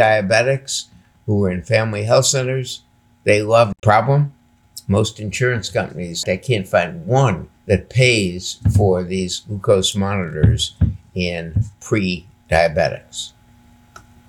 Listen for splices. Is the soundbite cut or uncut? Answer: cut